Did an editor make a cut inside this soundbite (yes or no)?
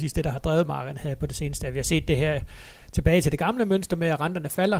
no